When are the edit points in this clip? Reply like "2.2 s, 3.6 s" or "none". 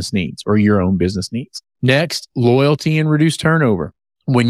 none